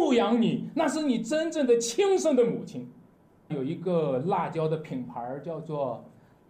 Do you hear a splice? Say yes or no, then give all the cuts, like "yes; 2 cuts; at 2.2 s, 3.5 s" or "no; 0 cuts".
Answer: yes; 1 cut; at 3.5 s